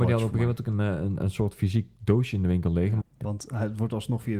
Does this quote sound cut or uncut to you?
cut